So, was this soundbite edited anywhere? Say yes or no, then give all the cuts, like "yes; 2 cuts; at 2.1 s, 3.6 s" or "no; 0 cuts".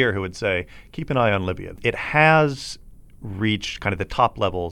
yes; 1 cut; at 1.8 s